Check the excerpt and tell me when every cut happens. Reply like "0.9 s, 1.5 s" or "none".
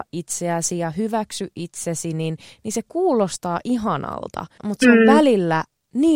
4.6 s